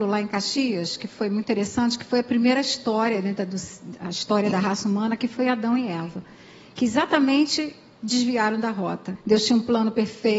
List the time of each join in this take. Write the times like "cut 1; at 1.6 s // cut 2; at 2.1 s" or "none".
cut 1; at 9.2 s